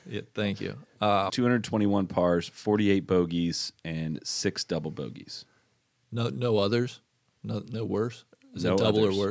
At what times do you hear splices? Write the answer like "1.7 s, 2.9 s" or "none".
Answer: 1.3 s

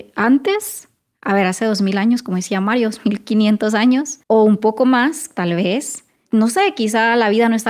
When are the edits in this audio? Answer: 4.2 s

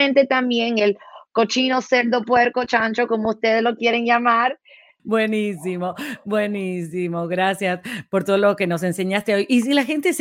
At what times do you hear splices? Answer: 5.0 s

